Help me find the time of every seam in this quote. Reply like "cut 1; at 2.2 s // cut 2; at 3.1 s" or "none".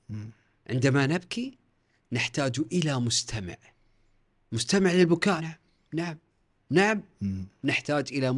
cut 1; at 5.4 s